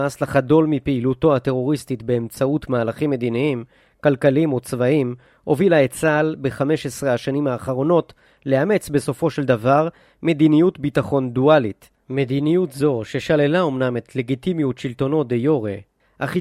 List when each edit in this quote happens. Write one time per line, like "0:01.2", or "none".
none